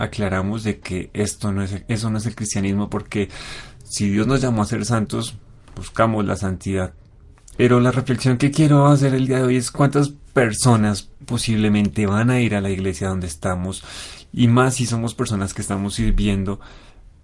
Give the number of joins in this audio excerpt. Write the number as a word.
two